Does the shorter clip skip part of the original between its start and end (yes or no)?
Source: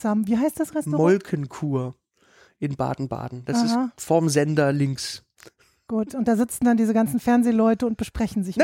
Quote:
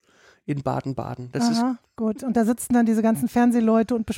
yes